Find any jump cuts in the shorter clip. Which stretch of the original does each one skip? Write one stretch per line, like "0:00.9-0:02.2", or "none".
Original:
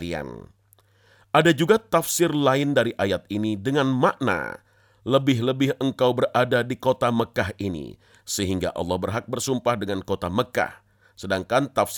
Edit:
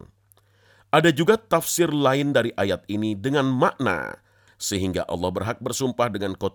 0:04.9-0:08.1